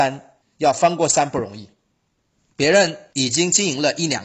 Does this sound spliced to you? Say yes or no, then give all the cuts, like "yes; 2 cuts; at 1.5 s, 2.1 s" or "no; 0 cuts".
no; 0 cuts